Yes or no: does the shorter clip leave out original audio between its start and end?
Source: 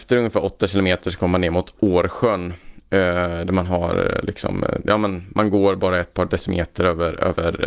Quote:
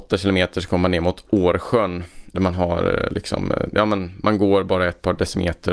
yes